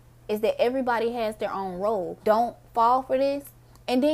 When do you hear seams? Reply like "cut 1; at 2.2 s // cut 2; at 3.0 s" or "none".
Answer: cut 1; at 2.2 s